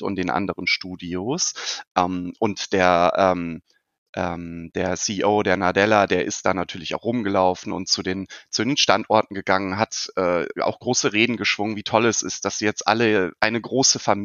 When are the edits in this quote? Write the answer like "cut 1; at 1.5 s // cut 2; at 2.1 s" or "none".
none